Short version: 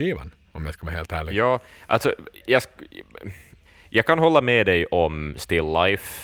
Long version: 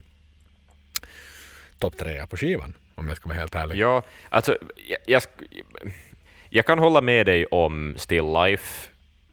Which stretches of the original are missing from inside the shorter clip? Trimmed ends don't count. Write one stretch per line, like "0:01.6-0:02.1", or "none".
0:04.8-0:05.0